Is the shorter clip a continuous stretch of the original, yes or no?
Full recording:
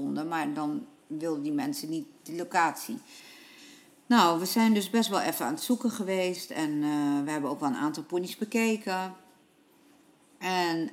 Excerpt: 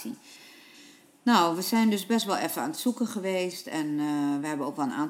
yes